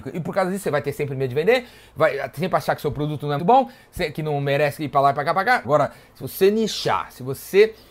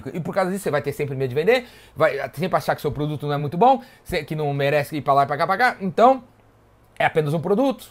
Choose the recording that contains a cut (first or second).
first